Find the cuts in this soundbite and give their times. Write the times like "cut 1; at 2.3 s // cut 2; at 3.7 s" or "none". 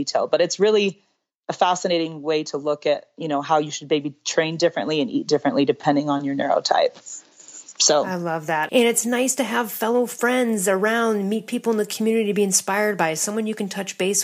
cut 1; at 8.7 s